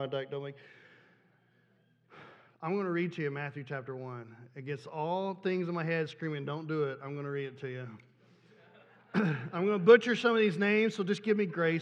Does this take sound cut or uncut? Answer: uncut